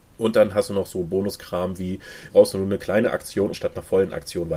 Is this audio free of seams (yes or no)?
no